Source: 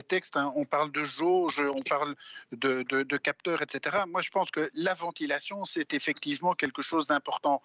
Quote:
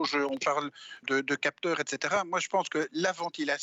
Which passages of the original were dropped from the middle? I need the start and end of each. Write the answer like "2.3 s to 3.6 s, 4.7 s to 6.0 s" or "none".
2.5 s to 2.8 s